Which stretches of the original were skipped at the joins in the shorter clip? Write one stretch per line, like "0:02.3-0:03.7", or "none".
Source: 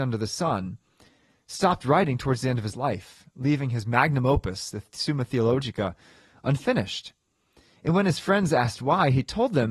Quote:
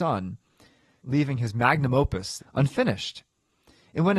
0:01.4-0:03.3
0:04.7-0:06.3